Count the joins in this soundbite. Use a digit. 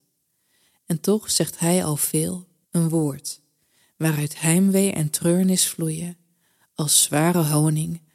1